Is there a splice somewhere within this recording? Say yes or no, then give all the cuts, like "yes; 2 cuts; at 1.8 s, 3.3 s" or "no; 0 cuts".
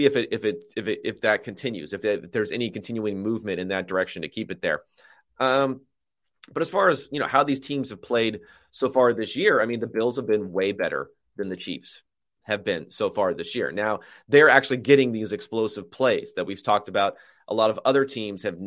no; 0 cuts